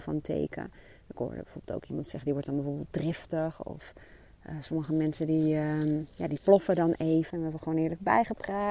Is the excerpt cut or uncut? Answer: cut